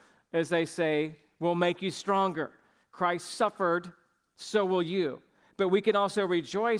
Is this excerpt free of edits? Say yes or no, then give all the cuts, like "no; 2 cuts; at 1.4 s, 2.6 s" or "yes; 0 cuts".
yes; 0 cuts